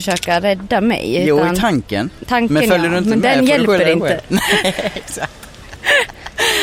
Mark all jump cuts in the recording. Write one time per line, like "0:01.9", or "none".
none